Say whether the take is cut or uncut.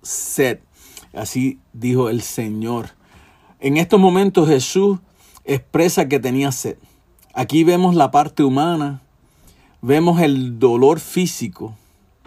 uncut